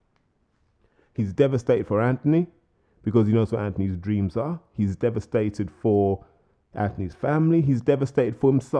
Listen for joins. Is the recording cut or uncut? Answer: uncut